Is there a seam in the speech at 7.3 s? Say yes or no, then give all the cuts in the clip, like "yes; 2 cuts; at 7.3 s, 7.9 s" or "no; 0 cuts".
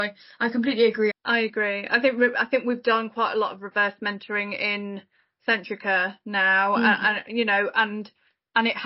no; 1 cut; at 1.1 s